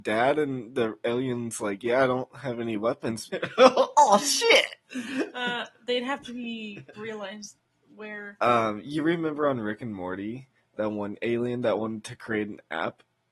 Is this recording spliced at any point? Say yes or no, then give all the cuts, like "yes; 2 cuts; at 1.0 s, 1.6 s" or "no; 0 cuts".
yes; 2 cuts; at 3.3 s, 6.9 s